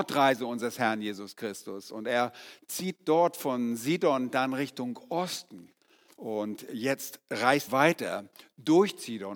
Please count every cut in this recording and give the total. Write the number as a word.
two